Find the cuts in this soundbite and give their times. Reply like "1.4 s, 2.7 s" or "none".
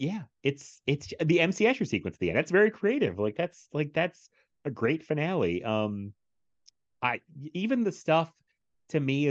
none